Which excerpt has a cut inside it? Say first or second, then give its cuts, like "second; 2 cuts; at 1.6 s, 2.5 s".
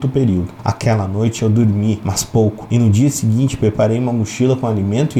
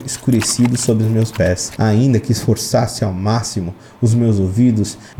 second; 1 cut; at 1.7 s